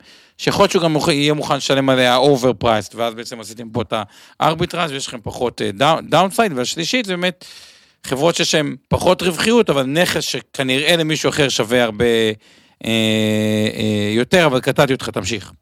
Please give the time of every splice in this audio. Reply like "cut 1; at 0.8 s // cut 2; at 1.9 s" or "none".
cut 1; at 8.8 s

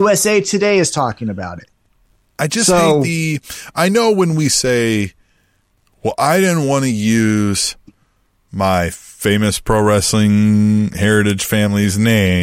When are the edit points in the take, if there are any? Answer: none

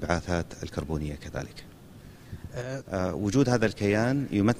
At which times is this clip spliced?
cut 1; at 2.8 s

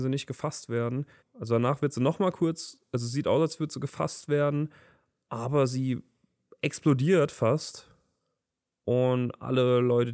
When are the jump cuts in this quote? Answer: cut 1; at 1.2 s

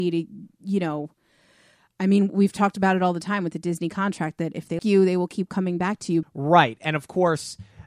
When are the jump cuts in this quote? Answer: cut 1; at 4.8 s // cut 2; at 6.2 s

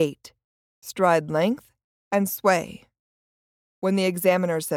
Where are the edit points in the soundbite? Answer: cut 1; at 3.6 s

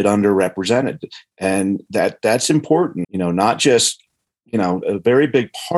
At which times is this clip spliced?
cut 1; at 3.0 s // cut 2; at 4.8 s

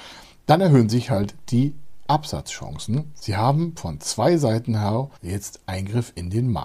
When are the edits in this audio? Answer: cut 1; at 3.2 s // cut 2; at 5.2 s

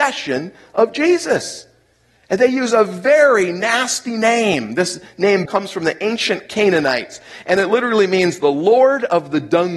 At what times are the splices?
cut 1; at 5.5 s

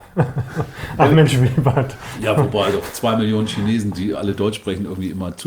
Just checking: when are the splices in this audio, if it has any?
none

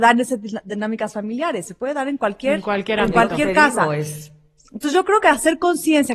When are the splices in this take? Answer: none

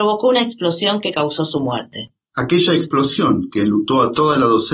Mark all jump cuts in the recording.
none

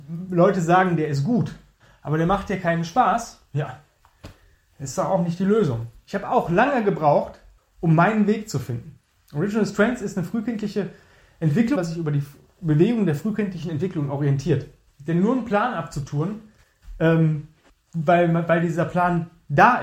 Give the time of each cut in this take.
cut 1; at 9.1 s // cut 2; at 11.7 s // cut 3; at 14.9 s

